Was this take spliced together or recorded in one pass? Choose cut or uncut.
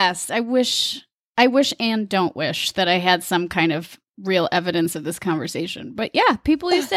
uncut